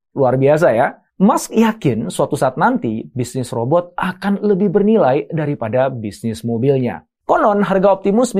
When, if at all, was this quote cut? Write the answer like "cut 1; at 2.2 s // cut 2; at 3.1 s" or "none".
cut 1; at 1.1 s